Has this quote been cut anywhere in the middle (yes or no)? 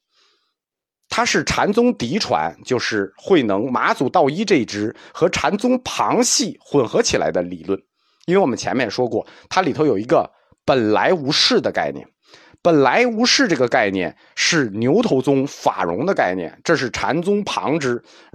no